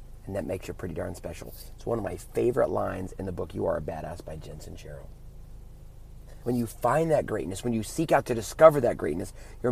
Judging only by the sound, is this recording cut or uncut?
cut